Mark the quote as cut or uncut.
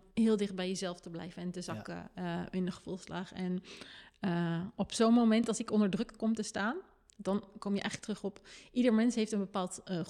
uncut